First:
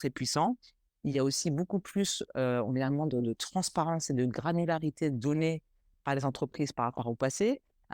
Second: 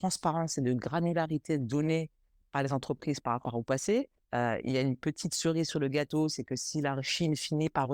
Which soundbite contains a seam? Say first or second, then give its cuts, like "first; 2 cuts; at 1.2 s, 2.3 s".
second; 1 cut; at 4.2 s